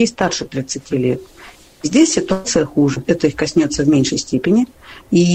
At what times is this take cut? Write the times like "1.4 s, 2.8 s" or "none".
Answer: 3.0 s